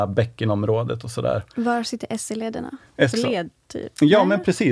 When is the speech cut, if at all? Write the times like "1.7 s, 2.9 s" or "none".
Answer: 3.1 s